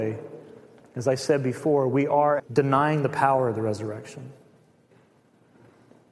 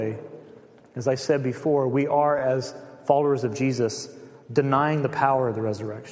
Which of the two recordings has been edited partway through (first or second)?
first